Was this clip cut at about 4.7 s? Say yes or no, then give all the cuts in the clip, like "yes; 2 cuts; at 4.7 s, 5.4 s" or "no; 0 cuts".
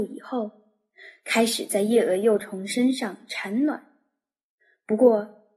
no; 0 cuts